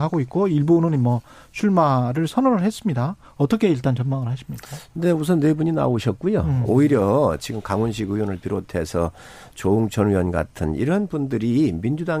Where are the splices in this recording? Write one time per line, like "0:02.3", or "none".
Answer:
0:06.6